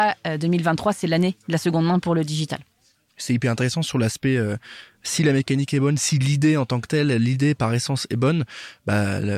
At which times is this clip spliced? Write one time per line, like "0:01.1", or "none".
none